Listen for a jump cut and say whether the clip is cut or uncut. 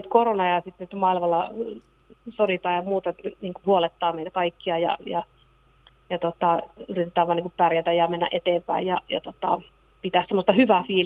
cut